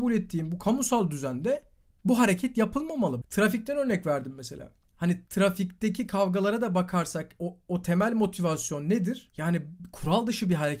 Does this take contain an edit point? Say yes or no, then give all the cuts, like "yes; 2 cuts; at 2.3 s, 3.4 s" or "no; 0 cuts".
yes; 1 cut; at 3.2 s